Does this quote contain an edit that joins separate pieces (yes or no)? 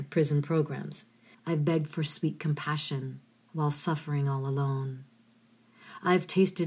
yes